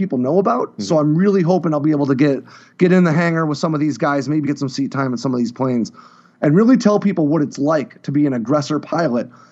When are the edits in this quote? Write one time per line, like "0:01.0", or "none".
0:04.4